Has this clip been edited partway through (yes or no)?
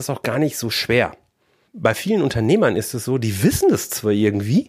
yes